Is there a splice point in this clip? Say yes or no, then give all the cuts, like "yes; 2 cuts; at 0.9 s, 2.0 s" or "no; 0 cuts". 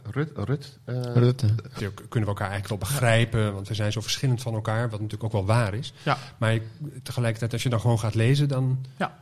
yes; 1 cut; at 1.8 s